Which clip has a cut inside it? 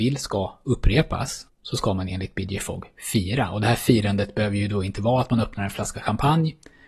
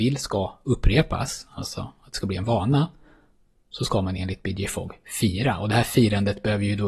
first; 1 cut; at 1.5 s

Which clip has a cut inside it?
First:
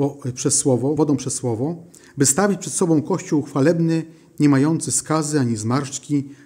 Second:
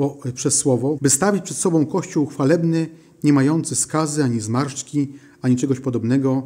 second; 1 cut; at 1.0 s

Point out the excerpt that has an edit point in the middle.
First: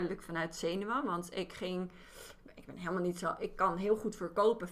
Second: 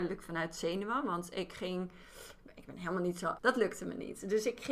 second; 1 cut; at 3.4 s

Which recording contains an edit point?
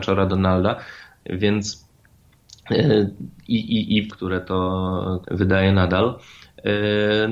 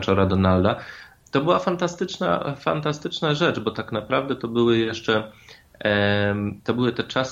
first; 3 cuts; at 1.2 s, 4.1 s, 5.2 s

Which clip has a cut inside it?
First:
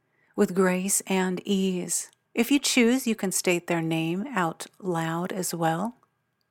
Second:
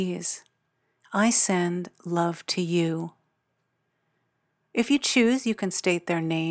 first; 1 cut; at 2.3 s

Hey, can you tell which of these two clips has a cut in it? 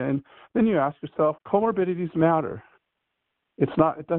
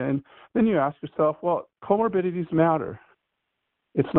first; 1 cut; at 1.4 s

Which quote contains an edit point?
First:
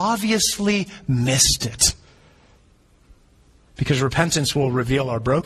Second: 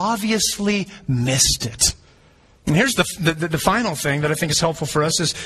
second; 1 cut; at 2.6 s

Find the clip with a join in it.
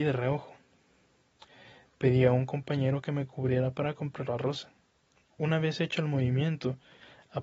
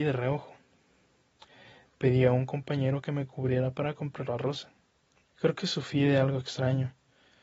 second; 1 cut; at 5.3 s

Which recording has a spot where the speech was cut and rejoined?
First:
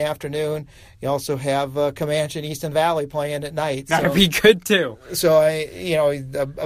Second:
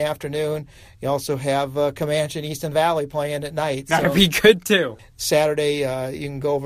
second; 1 cut; at 5.0 s

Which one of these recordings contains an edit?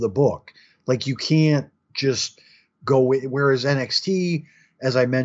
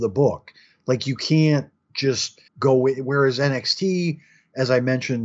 second; 1 cut; at 2.5 s

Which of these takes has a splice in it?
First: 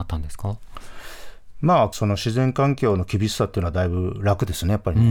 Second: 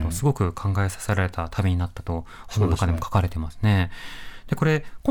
first; 1 cut; at 1.9 s

